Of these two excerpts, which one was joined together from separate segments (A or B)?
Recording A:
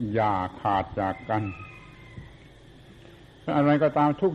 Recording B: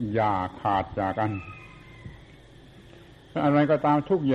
B